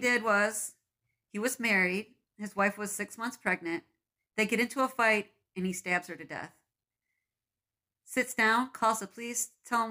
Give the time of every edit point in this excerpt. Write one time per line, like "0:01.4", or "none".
none